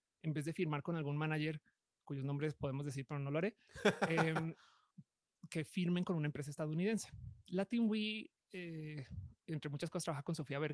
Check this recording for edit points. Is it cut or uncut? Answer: uncut